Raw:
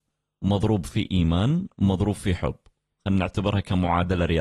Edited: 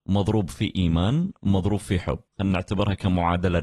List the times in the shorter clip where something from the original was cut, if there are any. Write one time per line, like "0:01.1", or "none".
0:02.3